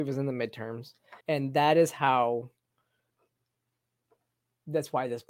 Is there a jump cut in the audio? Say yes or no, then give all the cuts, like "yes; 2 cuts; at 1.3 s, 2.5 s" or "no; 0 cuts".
yes; 1 cut; at 1.2 s